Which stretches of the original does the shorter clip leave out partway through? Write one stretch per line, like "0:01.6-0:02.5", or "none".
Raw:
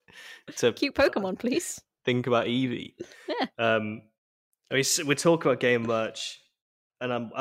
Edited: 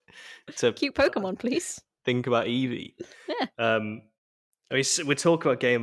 none

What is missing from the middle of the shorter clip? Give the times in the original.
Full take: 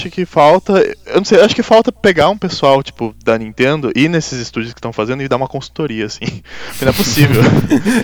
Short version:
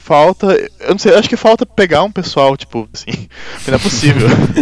0:03.2-0:06.1

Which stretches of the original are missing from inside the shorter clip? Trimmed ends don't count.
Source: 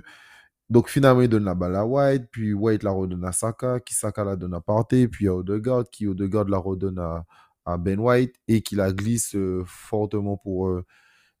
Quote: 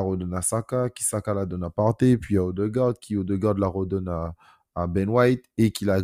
none

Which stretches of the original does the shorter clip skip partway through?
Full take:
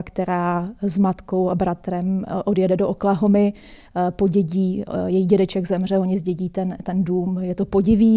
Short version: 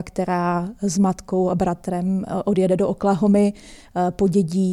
none

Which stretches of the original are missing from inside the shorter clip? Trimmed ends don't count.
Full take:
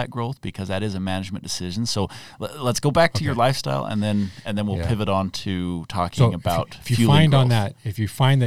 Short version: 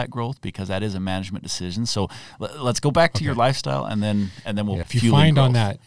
0:04.8-0:06.8

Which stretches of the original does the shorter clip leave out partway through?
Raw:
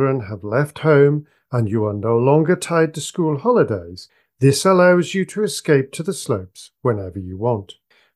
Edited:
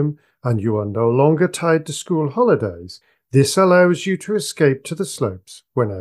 none

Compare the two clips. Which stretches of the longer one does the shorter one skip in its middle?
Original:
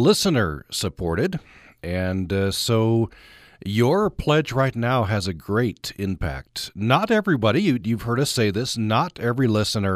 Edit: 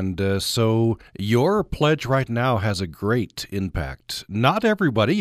0:03.2-0:03.5

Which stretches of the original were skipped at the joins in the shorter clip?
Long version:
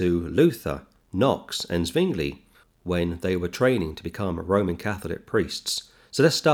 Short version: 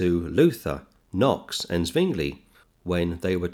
none

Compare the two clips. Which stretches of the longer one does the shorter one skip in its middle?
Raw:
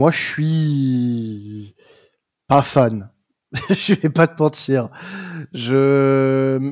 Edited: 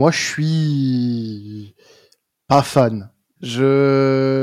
0:03.4-0:05.5

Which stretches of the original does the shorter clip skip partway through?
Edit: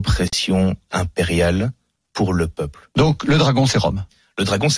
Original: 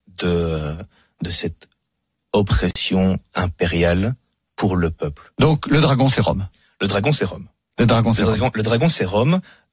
none

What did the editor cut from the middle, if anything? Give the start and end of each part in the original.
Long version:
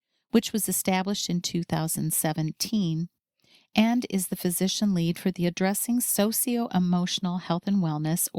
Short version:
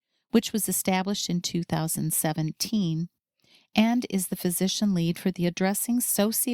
none

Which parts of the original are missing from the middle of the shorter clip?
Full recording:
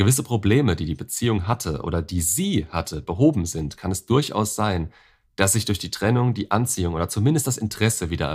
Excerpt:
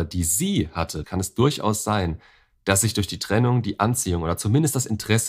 0:03.0-0:03.8

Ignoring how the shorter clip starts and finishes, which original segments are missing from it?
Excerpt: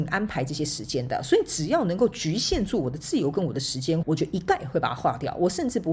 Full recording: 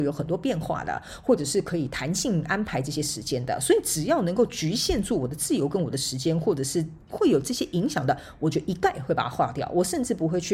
0:06.4-0:08.4

